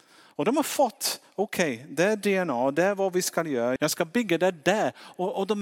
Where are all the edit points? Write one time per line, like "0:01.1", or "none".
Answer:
0:03.8